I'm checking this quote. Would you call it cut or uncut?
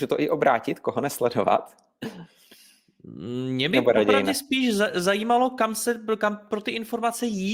uncut